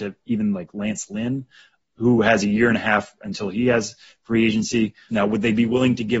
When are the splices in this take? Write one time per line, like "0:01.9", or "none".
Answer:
0:01.8
0:05.1